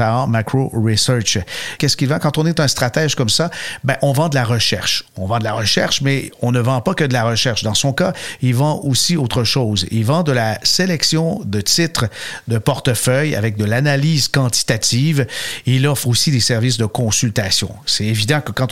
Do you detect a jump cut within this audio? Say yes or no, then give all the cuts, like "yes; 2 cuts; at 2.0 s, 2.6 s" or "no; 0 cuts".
yes; 1 cut; at 1.8 s